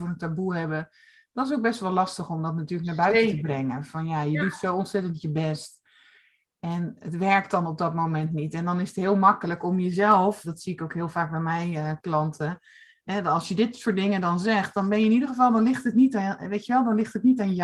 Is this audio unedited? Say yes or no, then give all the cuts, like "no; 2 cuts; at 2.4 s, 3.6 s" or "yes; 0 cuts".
no; 1 cut; at 10.4 s